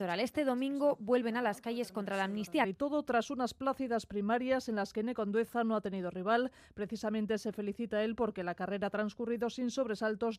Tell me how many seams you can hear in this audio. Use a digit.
1